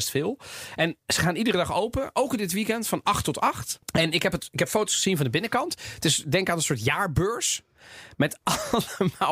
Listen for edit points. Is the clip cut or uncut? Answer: cut